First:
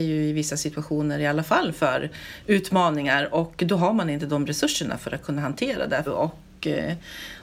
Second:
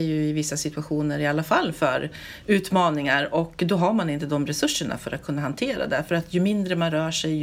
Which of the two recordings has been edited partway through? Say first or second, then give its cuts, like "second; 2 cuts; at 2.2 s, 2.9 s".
first; 1 cut; at 6.1 s